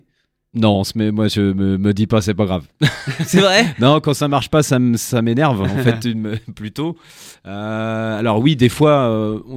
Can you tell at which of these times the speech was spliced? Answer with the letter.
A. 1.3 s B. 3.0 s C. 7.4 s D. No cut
D